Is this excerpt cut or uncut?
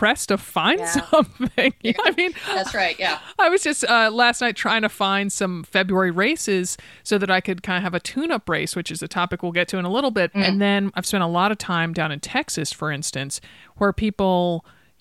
cut